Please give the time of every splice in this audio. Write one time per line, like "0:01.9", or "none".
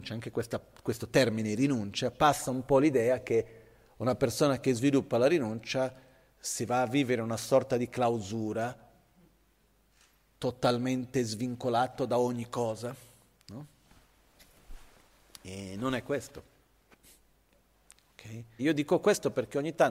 0:18.6